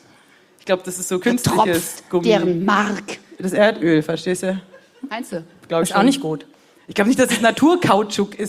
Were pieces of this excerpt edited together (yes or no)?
no